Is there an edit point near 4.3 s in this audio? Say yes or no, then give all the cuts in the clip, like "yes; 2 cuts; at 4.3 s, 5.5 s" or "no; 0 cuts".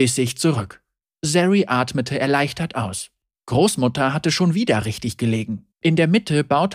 no; 2 cuts; at 1.0 s, 5.7 s